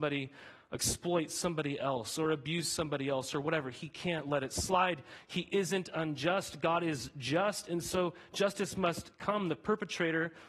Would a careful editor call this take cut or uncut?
uncut